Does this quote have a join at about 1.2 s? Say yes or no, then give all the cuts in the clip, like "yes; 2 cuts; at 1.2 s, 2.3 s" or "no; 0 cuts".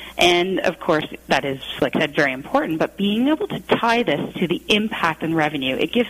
no; 0 cuts